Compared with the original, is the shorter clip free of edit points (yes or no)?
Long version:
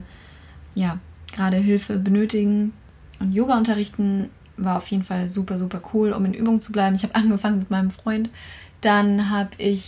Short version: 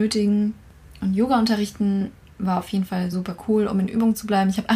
no